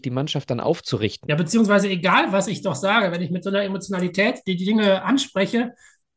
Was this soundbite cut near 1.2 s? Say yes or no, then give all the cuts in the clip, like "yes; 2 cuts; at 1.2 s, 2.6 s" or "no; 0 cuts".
yes; 1 cut; at 1.2 s